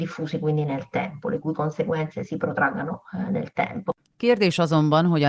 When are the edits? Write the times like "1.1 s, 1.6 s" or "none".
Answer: none